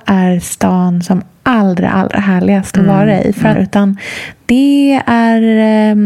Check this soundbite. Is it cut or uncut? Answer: cut